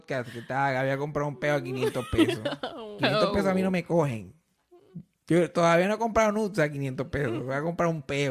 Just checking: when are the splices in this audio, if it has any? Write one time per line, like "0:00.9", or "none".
0:03.0